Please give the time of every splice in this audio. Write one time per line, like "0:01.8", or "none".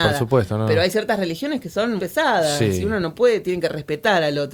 0:02.0